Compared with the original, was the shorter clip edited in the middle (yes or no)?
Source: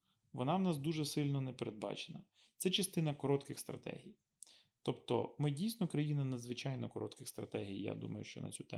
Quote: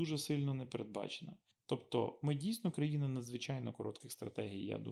yes